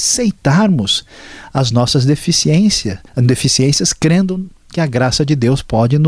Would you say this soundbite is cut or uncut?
cut